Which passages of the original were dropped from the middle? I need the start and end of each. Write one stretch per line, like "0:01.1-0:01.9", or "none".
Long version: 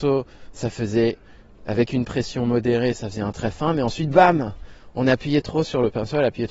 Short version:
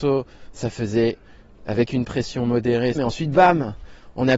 0:02.9-0:03.7